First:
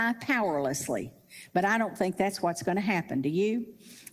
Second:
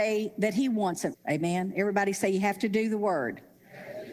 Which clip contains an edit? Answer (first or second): second